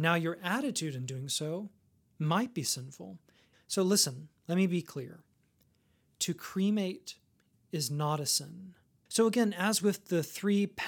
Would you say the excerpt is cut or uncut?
cut